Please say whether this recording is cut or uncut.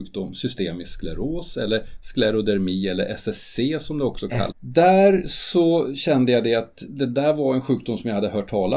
cut